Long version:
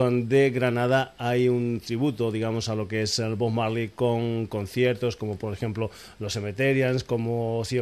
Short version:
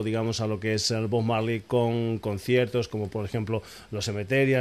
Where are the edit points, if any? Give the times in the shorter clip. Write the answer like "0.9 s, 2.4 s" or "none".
none